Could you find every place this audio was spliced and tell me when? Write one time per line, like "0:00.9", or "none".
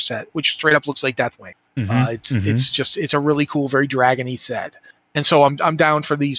none